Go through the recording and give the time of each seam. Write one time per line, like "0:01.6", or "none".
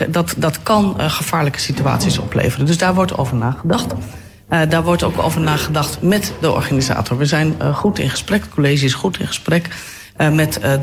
none